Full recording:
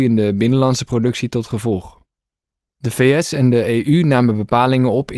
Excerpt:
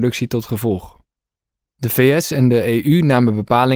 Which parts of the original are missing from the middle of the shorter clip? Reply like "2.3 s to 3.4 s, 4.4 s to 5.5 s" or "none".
none